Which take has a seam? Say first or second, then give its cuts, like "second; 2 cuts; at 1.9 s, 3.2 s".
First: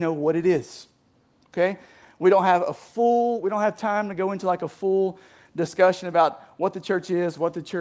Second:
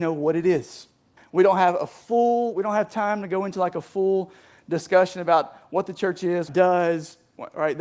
second; 2 cuts; at 1.2 s, 6.5 s